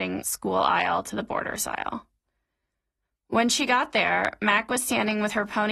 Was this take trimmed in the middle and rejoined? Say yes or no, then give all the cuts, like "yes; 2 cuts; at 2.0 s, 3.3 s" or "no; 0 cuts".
no; 0 cuts